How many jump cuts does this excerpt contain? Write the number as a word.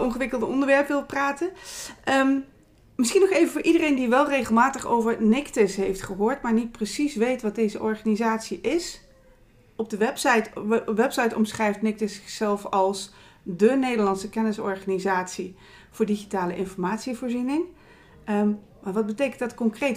zero